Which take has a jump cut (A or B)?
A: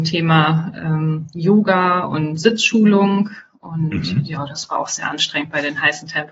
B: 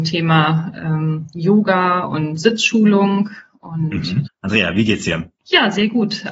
B